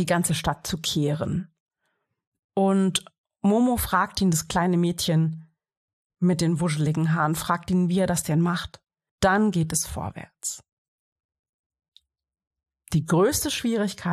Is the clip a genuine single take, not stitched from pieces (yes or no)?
no